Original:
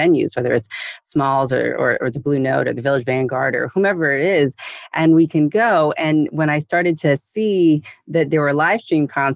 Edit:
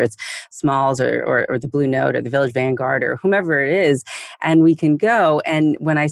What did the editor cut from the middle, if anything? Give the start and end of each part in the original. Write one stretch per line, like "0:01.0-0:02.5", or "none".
none